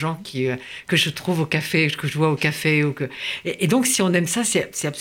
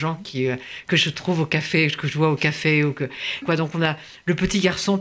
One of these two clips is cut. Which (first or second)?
second